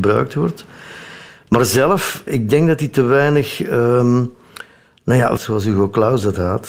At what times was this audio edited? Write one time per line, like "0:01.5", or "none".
0:02.3
0:05.4